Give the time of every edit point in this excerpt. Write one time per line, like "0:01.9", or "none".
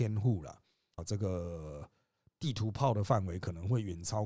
0:01.0